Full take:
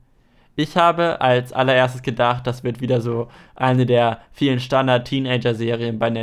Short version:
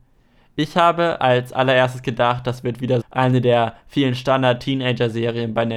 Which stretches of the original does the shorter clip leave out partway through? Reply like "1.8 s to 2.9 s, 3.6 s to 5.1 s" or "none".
3.0 s to 3.5 s